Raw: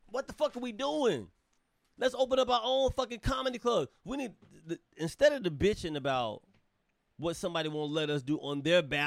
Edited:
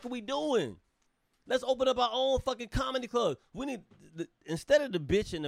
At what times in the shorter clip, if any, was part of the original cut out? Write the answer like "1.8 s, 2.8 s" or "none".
none